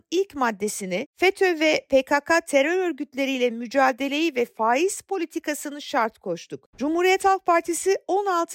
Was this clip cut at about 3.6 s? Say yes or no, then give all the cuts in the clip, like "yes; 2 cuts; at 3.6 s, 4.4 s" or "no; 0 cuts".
no; 2 cuts; at 1.1 s, 6.7 s